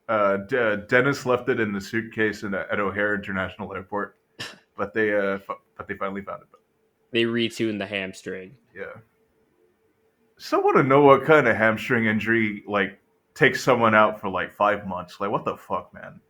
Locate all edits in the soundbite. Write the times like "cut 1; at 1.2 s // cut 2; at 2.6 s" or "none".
cut 1; at 8.6 s